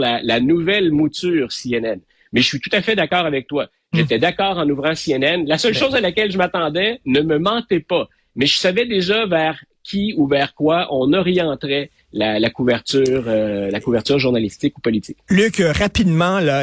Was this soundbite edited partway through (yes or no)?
no